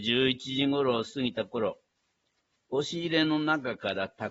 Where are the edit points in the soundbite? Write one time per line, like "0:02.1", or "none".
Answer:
none